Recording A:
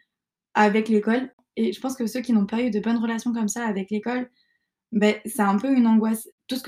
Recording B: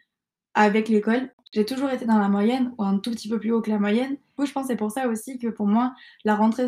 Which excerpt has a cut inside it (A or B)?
B